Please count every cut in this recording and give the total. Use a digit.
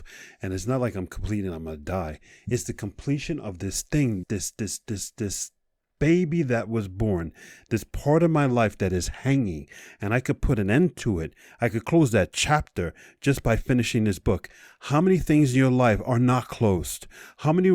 1